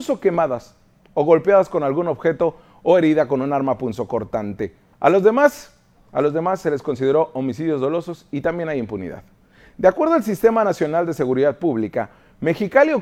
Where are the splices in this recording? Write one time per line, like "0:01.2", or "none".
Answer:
0:04.9